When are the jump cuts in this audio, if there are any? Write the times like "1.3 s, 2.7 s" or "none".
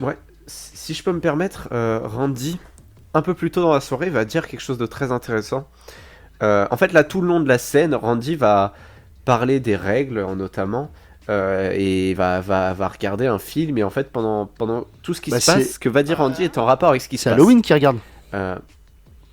none